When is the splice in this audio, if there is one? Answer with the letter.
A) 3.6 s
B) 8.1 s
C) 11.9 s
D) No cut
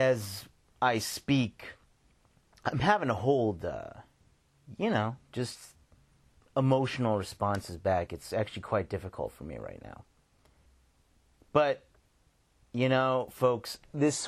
D